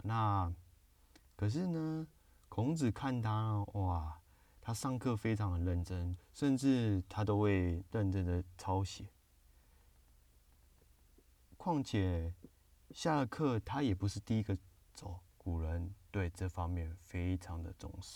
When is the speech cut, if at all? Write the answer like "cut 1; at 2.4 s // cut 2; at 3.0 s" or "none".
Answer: cut 1; at 6.2 s // cut 2; at 15.3 s